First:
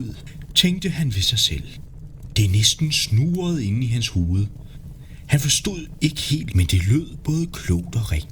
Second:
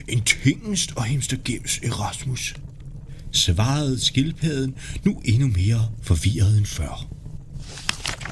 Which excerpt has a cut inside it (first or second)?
first